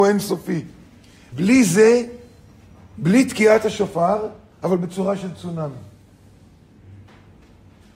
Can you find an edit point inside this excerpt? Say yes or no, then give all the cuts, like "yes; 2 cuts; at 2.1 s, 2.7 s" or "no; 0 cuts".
yes; 2 cuts; at 1.3 s, 4.5 s